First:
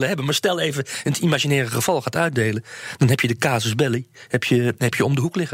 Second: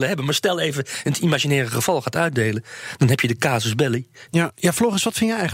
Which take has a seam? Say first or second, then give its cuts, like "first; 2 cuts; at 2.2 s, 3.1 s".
second; 1 cut; at 4.3 s